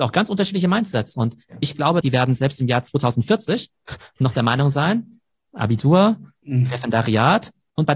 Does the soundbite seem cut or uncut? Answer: cut